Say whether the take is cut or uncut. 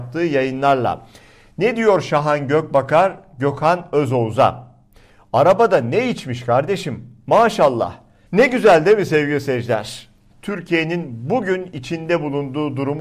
cut